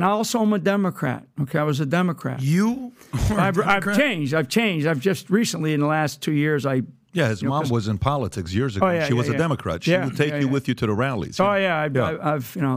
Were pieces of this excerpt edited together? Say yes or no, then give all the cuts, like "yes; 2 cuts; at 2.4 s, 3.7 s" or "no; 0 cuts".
no; 0 cuts